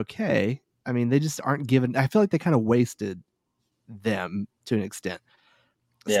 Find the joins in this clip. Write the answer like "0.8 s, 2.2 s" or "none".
none